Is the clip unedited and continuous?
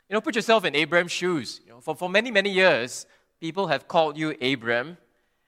yes; 0 cuts

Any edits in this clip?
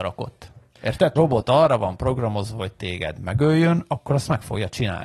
yes; 1 cut; at 1.2 s

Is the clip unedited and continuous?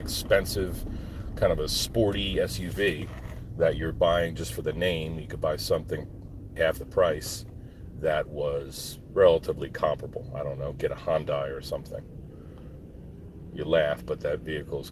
no; 1 cut; at 6.6 s

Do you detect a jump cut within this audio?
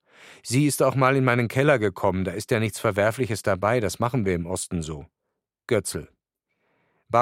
no; 0 cuts

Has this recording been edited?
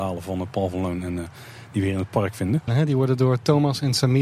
yes; 1 cut; at 2.7 s

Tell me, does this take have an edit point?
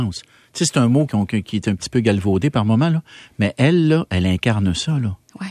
yes; 1 cut; at 1.1 s

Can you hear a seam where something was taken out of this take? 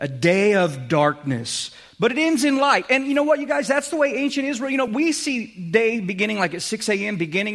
no; 0 cuts

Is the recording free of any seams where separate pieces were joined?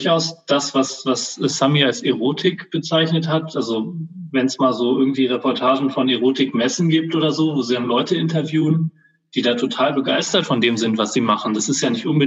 yes; 0 cuts

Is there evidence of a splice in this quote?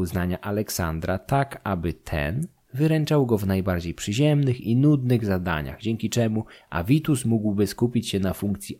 no; 0 cuts

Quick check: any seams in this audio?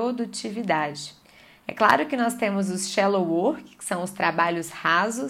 no; 0 cuts

